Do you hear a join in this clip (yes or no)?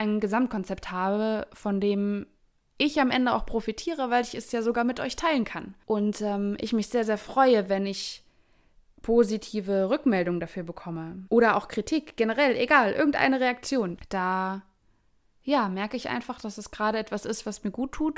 no